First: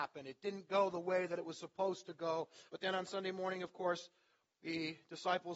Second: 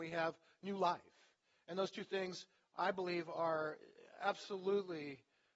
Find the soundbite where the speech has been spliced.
first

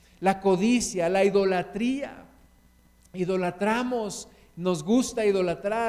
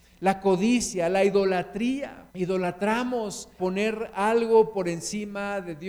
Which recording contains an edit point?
second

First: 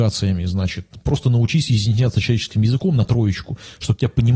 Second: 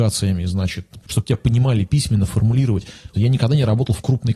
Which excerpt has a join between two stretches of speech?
second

